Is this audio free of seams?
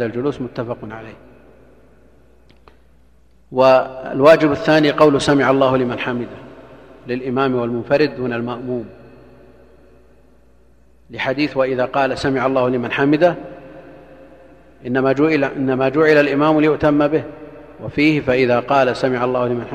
yes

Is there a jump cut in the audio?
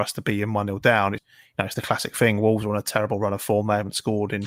yes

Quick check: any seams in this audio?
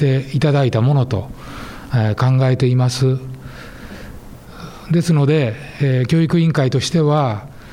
no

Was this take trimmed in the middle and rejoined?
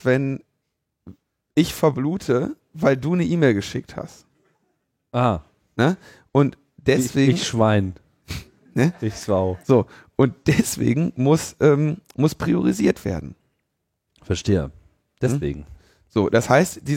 no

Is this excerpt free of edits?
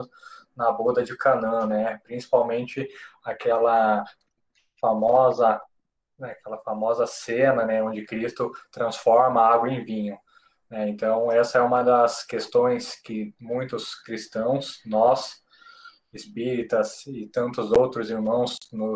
yes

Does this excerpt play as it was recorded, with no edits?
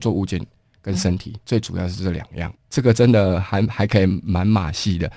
no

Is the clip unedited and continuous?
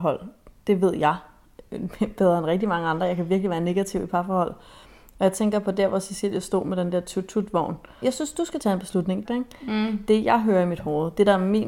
no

